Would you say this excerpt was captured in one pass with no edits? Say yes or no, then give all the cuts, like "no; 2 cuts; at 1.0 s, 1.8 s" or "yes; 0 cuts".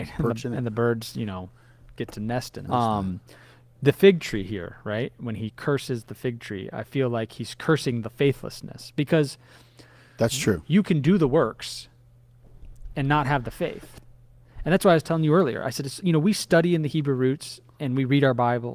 no; 1 cut; at 2.7 s